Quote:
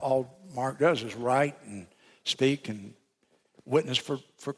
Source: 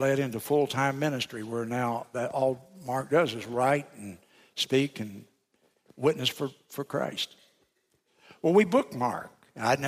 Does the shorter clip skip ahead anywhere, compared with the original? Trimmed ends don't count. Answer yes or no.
no